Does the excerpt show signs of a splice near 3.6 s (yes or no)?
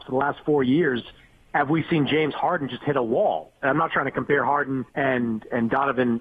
no